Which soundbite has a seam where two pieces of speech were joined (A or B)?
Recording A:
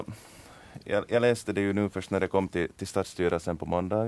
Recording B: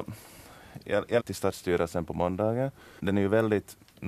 B